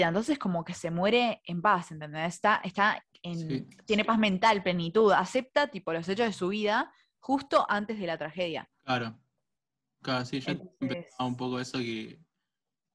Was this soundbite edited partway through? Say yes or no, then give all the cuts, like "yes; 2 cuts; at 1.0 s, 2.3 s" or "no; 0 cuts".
no; 0 cuts